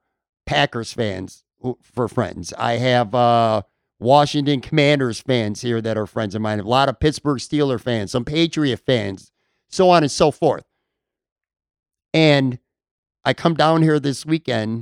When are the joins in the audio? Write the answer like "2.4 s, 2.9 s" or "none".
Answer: none